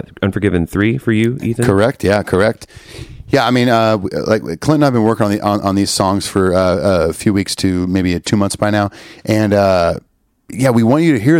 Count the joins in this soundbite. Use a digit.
0